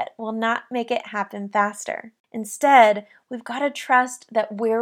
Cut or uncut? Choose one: uncut